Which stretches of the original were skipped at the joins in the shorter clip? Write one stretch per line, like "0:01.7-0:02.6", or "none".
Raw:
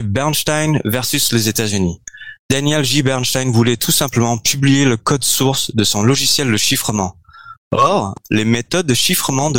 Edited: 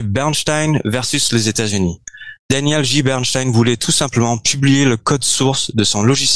none